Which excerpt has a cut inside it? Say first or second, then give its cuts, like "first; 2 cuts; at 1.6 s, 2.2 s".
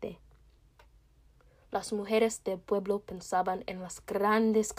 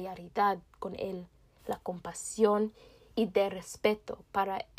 second; 1 cut; at 1.6 s